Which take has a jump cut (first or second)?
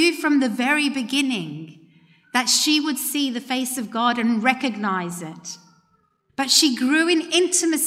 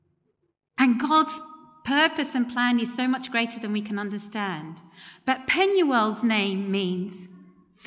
first